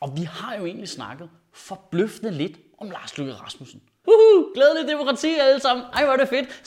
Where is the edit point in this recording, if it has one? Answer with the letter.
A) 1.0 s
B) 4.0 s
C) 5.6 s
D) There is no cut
B